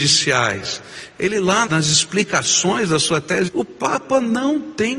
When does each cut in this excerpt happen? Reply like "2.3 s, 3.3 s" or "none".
1.7 s, 3.5 s